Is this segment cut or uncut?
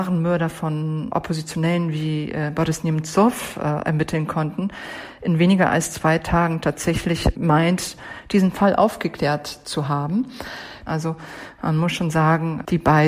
cut